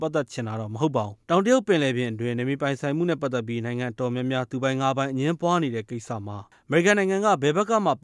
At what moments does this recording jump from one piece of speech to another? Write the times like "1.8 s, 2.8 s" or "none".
1.2 s